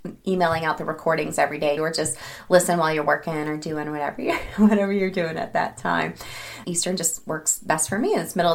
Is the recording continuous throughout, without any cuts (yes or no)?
no